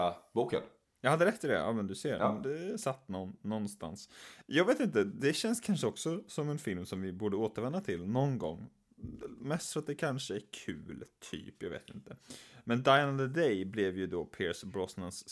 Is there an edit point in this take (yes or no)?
no